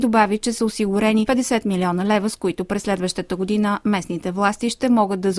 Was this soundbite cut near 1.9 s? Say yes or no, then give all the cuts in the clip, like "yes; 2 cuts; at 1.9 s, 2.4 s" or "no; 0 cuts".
no; 0 cuts